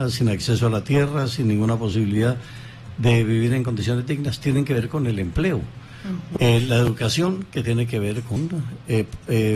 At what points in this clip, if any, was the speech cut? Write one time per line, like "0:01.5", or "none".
0:06.4